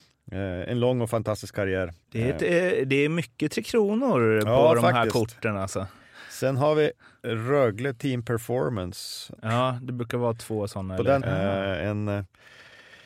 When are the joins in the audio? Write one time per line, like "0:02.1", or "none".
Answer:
0:02.0
0:09.3
0:11.2

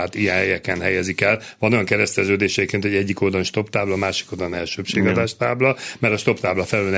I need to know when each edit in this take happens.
none

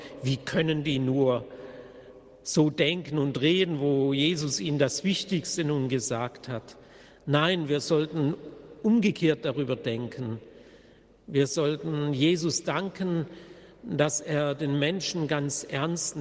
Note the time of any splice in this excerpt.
none

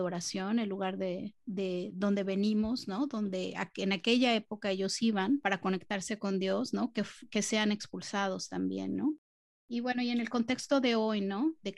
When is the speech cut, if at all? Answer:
none

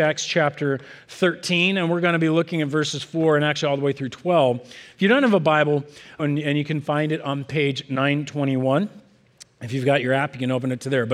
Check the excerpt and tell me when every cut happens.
0:06.2

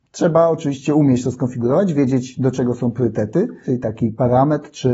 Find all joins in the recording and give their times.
0:03.6

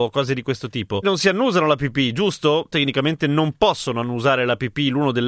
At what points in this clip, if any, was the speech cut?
0:01.0

